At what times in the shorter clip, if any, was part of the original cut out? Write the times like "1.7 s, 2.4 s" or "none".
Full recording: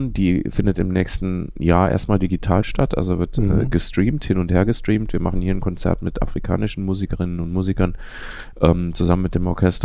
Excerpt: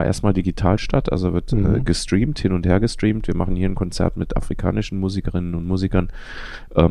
none